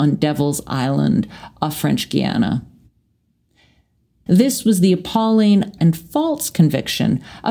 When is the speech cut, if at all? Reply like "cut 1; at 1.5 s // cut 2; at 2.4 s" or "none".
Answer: cut 1; at 4.3 s // cut 2; at 5.8 s